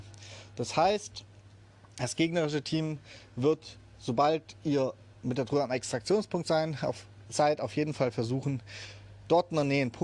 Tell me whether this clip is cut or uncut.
uncut